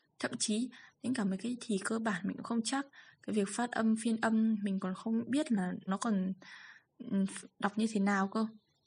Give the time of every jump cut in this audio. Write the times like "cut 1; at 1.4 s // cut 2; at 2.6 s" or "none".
cut 1; at 5.9 s